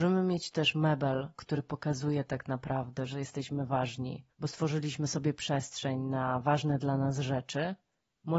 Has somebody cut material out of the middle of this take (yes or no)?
yes